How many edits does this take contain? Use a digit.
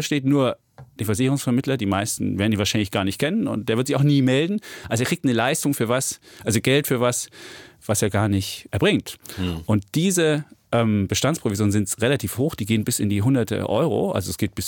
1